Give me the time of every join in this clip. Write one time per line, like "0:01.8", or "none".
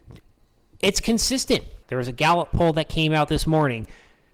0:01.8